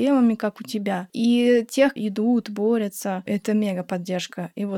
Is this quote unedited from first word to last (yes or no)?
no